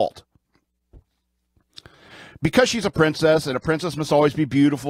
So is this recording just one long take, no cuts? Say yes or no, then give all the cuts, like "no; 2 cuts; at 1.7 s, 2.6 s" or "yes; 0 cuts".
yes; 0 cuts